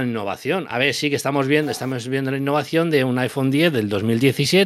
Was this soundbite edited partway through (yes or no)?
no